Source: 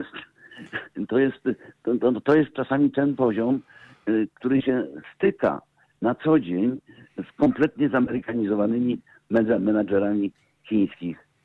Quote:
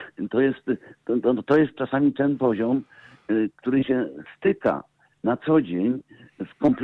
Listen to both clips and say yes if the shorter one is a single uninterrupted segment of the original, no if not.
yes